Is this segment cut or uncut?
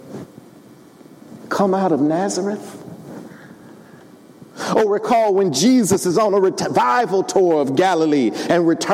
uncut